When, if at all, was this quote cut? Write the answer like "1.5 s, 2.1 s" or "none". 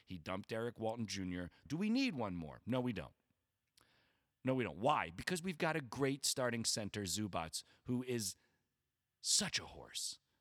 1.7 s